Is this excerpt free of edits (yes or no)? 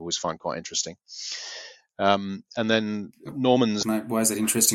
no